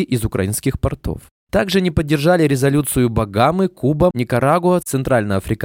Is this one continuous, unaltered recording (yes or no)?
no